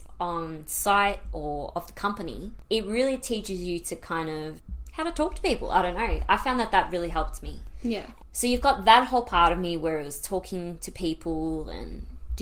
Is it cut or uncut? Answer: uncut